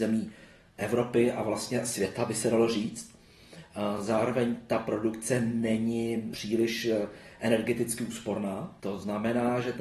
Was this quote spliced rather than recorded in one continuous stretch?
no; 0 cuts

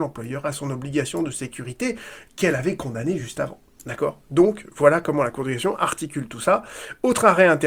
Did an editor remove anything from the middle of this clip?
no; 0 cuts

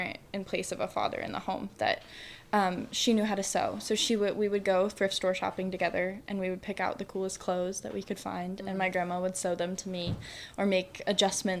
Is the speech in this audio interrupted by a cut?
no; 0 cuts

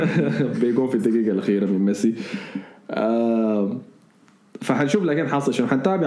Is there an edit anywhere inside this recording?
no; 0 cuts

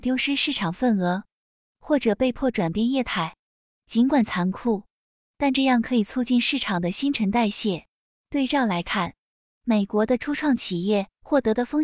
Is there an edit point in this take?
yes; 1 cut; at 8.1 s

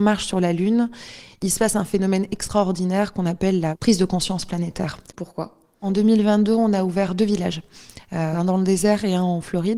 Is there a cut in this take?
yes; 1 cut; at 5.1 s

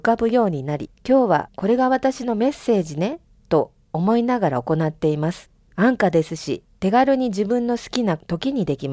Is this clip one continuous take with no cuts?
yes; 0 cuts

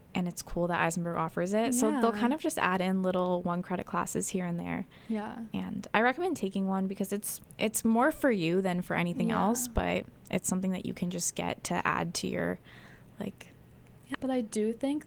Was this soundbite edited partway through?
yes; 1 cut; at 14.1 s

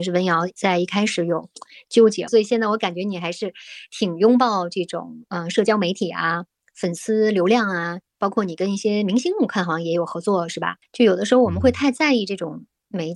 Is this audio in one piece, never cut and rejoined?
no; 2 cuts; at 2.3 s, 10.8 s

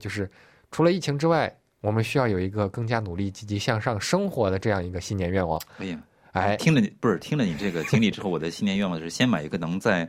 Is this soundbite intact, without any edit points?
yes; 0 cuts

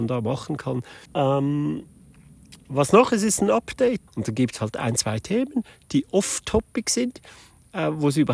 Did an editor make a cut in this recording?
yes; 2 cuts; at 1.1 s, 4.1 s

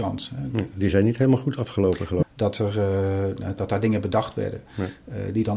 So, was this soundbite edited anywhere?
yes; 2 cuts; at 2.2 s, 3.6 s

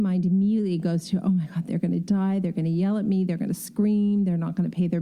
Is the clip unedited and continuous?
yes; 0 cuts

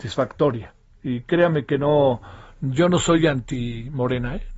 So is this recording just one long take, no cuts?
yes; 0 cuts

